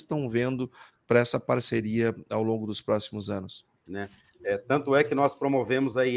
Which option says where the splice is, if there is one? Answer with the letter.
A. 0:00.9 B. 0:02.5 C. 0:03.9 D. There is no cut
C